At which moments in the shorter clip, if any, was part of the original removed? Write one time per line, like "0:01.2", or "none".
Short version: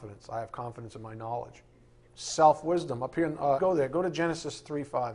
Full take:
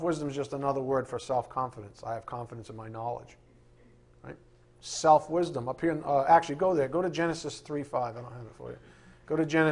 0:02.1
0:03.6